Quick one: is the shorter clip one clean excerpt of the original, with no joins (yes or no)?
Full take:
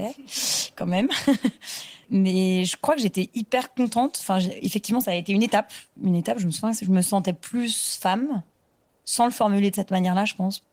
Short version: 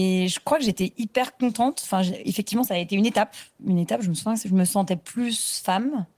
yes